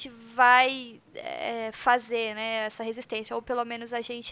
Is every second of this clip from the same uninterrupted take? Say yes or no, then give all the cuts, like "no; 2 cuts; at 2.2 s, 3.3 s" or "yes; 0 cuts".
yes; 0 cuts